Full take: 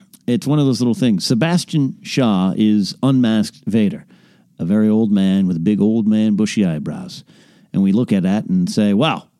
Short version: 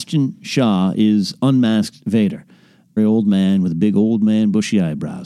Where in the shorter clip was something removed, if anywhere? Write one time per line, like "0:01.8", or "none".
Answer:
0:03.0